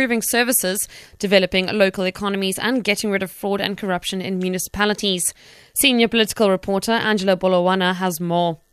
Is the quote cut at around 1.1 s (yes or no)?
no